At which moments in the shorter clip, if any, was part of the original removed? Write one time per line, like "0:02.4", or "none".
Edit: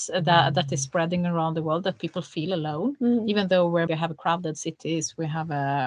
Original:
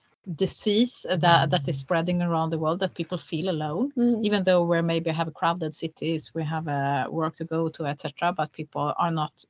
0:03.9

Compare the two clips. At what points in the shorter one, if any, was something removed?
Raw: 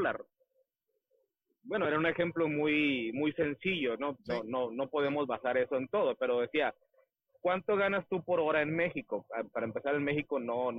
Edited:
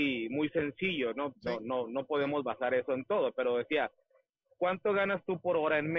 none

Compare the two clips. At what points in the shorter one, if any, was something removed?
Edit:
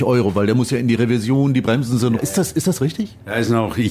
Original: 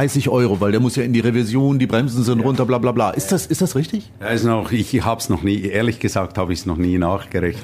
0:02.2

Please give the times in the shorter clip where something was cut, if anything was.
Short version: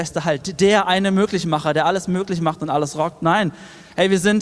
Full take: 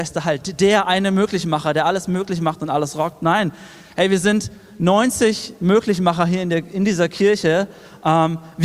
none

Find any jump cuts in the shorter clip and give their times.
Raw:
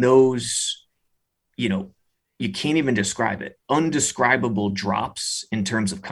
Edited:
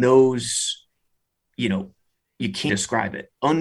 0:02.7

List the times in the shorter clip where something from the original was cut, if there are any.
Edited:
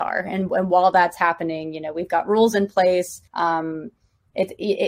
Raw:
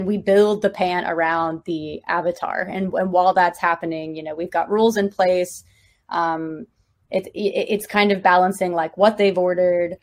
0:03.3

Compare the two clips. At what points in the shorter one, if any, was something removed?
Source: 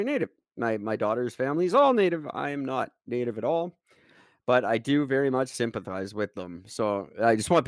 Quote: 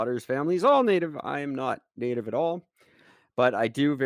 none

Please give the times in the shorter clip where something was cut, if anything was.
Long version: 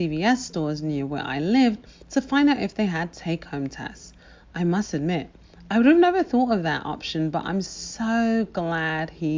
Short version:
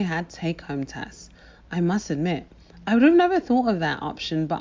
none

